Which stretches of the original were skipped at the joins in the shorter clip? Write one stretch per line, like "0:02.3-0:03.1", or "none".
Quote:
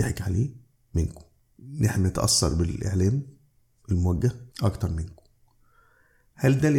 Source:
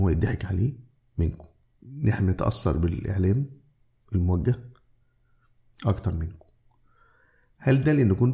0:04.7-0:05.7